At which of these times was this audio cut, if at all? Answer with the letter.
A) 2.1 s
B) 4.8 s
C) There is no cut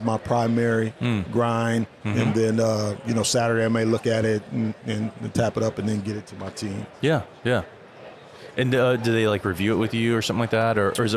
C